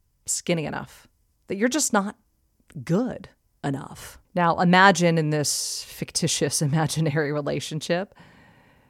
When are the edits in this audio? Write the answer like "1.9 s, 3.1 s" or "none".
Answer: 1.4 s, 4.2 s